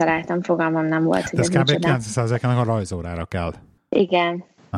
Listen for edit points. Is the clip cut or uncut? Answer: uncut